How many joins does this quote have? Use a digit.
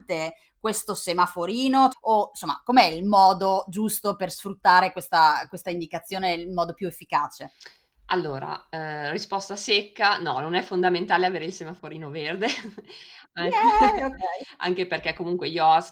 1